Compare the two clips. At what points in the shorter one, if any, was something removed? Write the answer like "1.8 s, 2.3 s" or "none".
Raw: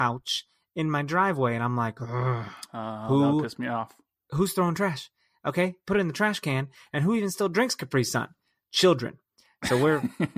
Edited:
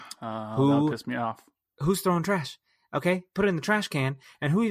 none